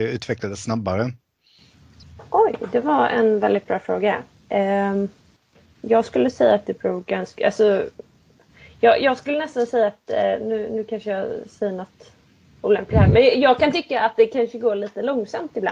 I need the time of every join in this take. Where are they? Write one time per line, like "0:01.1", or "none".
none